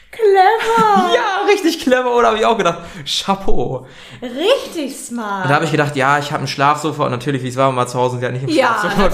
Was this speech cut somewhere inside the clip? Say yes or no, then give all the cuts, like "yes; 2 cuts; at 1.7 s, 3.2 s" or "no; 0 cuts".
no; 0 cuts